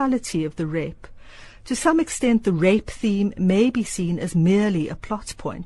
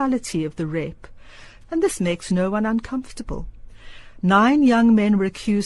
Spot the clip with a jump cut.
second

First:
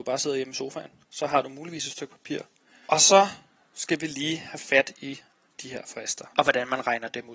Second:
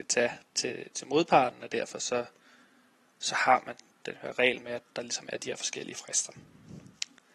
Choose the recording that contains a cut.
first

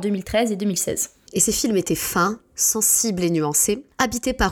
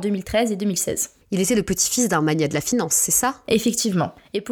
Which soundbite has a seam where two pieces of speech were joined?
second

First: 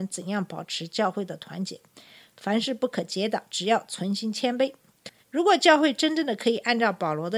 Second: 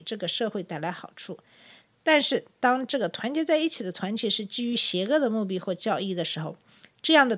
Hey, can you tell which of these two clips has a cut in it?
first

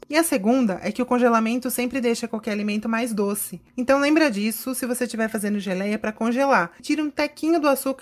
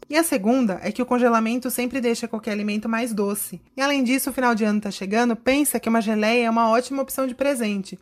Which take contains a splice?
second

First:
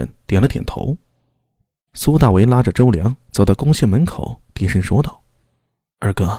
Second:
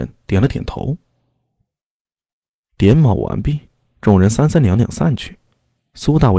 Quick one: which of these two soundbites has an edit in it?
first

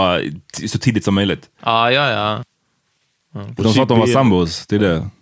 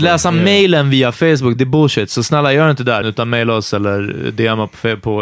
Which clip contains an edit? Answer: second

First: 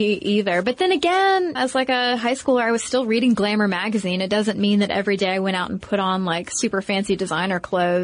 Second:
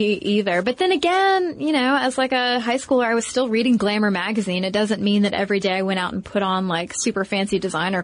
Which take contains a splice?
first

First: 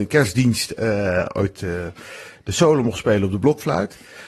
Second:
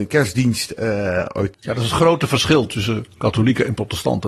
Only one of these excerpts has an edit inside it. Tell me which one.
second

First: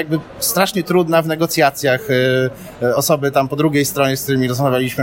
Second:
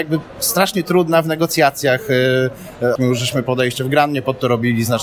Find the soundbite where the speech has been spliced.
second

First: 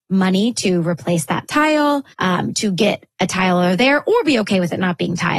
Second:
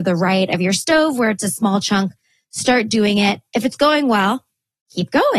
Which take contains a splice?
first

